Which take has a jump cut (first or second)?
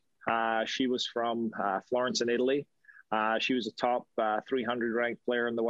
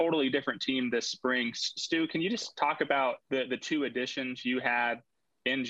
second